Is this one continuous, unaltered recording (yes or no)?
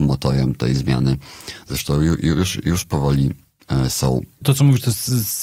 yes